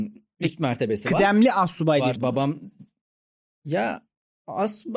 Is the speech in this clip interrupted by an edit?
yes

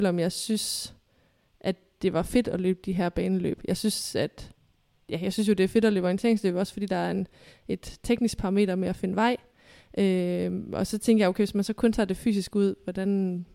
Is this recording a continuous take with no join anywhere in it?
yes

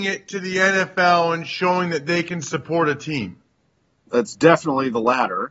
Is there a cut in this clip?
no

